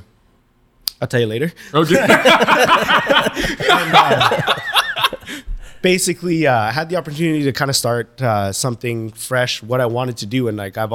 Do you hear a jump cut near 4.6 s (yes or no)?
no